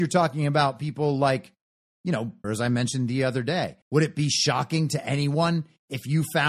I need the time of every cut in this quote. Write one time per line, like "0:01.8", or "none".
0:02.4
0:03.8